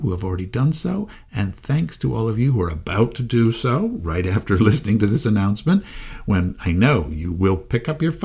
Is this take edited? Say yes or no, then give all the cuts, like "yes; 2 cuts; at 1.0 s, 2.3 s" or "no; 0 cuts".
no; 0 cuts